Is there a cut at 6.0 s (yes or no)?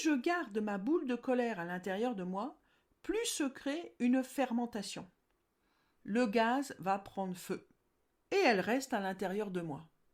yes